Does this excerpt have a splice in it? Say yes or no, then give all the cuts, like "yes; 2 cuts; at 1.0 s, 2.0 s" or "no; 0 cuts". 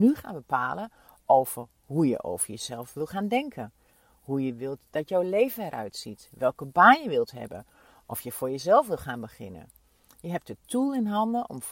no; 0 cuts